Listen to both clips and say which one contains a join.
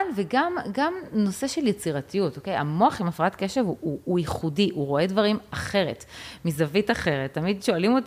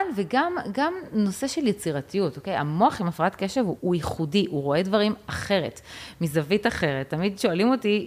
second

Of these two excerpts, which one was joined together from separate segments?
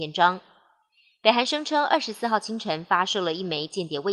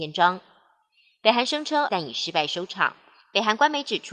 second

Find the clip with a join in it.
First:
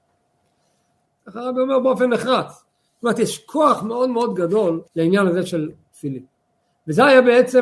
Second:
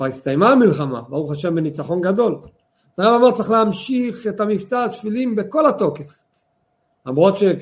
first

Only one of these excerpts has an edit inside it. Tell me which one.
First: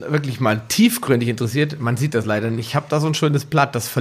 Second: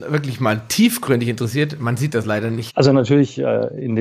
second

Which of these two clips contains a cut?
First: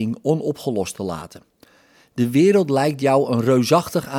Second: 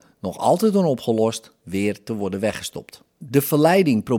second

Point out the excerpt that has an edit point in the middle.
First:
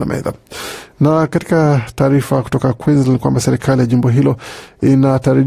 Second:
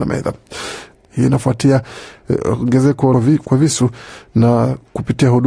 second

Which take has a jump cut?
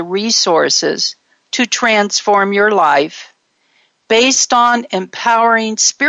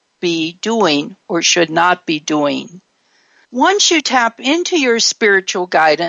second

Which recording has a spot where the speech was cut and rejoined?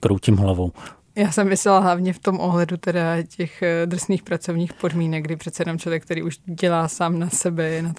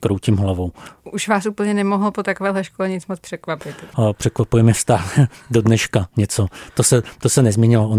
second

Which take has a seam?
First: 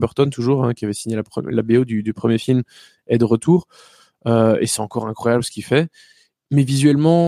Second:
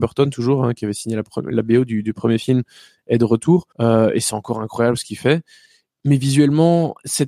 second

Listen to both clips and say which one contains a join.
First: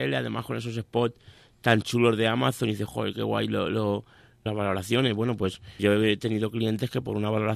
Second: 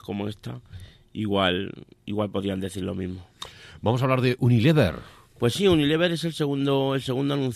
first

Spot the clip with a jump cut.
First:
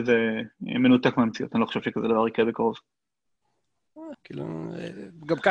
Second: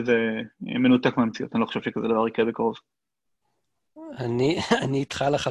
first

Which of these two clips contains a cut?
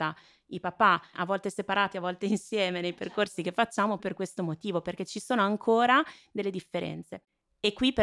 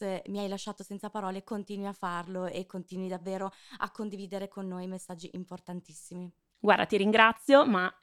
first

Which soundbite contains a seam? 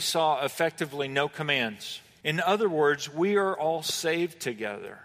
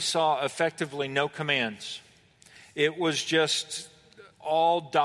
first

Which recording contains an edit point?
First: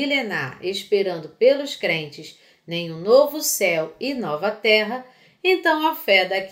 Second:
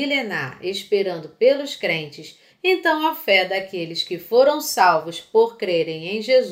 second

